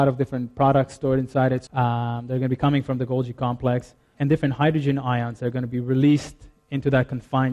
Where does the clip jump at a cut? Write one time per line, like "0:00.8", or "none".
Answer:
0:01.7
0:04.1

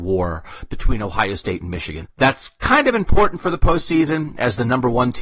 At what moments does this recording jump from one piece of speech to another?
0:02.0

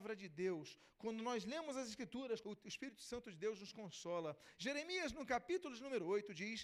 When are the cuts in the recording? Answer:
0:02.4
0:04.6

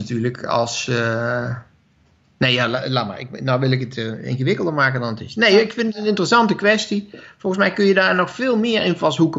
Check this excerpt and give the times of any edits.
none

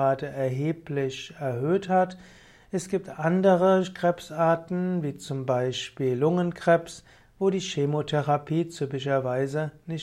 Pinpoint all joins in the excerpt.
none

